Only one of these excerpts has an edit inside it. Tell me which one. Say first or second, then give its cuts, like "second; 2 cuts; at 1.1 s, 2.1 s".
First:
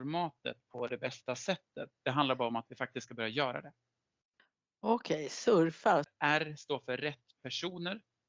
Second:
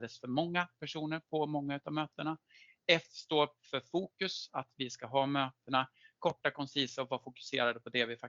first; 2 cuts; at 1.9 s, 6.0 s